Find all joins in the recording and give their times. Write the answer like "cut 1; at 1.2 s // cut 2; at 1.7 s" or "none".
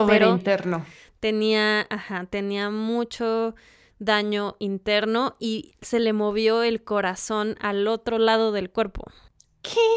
none